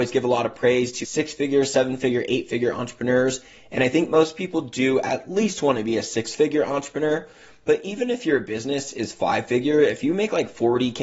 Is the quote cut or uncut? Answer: cut